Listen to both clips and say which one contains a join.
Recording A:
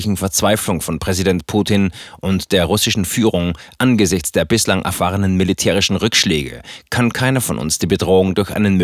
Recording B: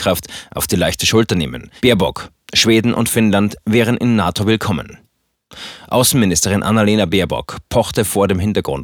B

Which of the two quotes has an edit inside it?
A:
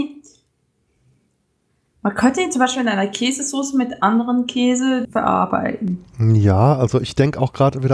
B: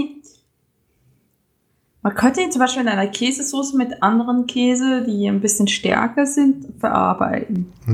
A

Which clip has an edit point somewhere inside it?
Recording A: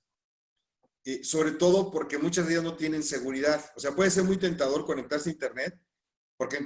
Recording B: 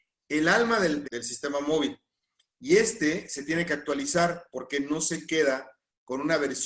B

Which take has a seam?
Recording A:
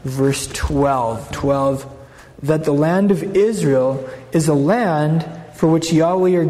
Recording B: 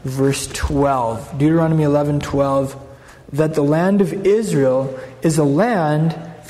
A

